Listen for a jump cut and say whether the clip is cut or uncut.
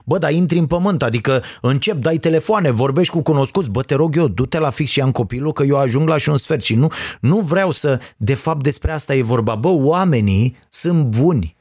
uncut